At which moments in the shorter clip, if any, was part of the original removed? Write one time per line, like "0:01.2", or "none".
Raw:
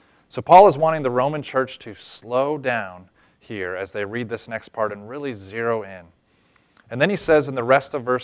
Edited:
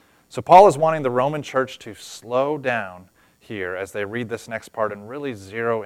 none